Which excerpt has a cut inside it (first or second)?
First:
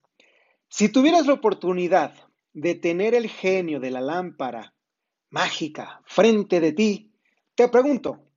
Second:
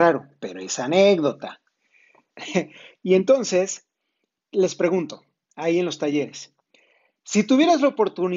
second